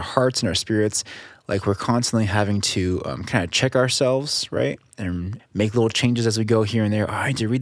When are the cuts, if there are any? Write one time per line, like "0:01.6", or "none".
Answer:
0:05.4